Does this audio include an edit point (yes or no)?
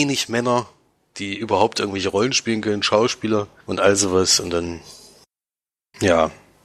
no